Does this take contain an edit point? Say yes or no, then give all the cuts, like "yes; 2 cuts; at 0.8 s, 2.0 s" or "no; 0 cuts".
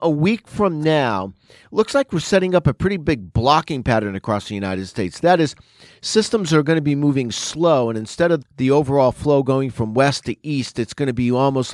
yes; 1 cut; at 8.4 s